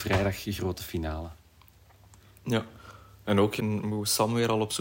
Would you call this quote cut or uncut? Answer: cut